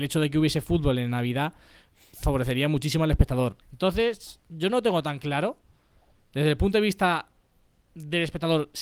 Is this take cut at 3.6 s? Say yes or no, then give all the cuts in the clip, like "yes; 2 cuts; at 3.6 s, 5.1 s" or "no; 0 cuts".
yes; 1 cut; at 3.6 s